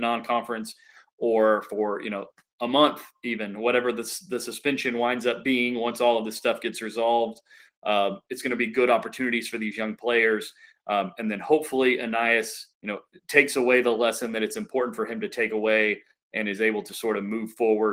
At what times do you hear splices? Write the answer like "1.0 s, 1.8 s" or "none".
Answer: 12.7 s